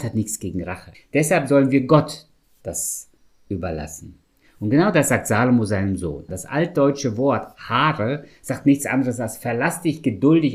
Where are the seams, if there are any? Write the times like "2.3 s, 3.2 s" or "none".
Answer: 0.9 s, 6.3 s